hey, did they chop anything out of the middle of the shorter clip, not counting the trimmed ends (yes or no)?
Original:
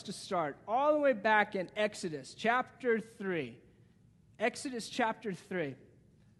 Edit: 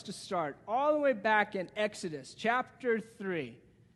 no